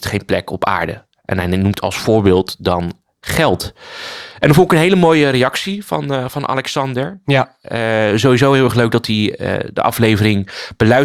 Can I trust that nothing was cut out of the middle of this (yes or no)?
yes